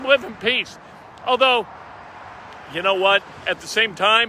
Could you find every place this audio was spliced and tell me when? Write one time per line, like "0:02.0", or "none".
none